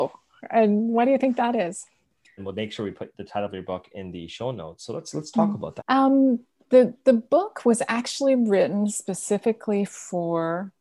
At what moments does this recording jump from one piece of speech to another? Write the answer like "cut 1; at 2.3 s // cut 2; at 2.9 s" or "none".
cut 1; at 2.4 s // cut 2; at 5.8 s